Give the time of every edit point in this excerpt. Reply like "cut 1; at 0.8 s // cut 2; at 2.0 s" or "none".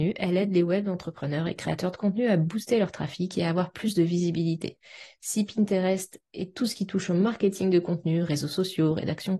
none